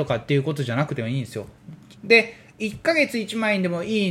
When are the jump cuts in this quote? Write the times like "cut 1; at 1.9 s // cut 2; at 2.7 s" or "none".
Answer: cut 1; at 1.9 s

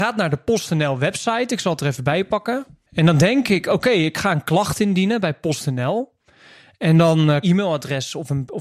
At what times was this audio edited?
cut 1; at 7.4 s

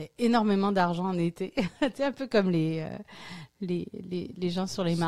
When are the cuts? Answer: none

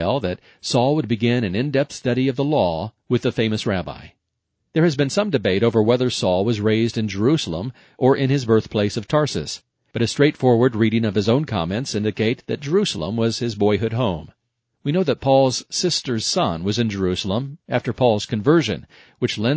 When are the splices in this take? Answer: none

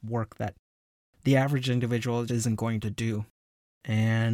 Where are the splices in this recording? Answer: cut 1; at 2.3 s

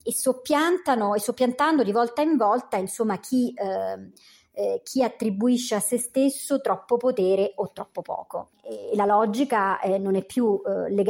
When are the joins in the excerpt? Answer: none

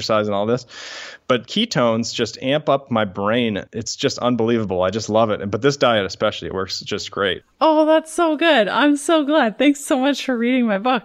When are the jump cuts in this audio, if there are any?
none

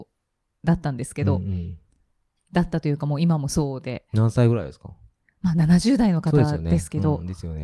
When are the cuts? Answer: none

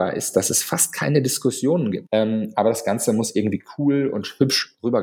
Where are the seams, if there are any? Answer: cut 1; at 2.1 s

